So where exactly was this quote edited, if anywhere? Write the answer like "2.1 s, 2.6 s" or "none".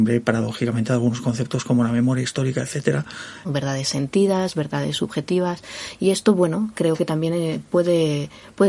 3.4 s, 6.7 s